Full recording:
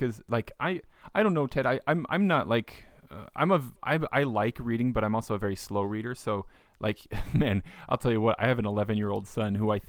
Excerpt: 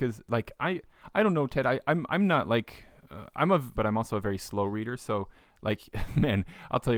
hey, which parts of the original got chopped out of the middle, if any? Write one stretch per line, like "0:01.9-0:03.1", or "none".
0:03.8-0:04.9